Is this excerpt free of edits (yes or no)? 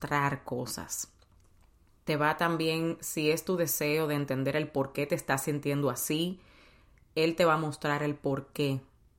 yes